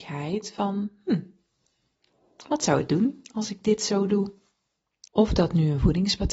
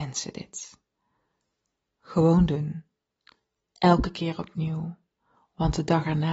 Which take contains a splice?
first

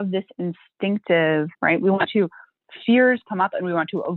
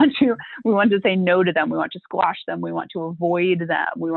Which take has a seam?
first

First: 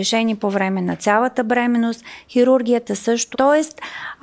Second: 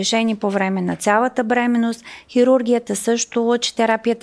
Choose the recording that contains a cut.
first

